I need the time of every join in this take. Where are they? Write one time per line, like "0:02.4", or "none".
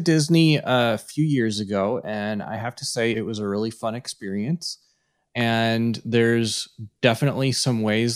none